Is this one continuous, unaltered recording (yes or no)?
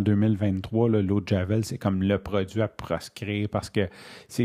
yes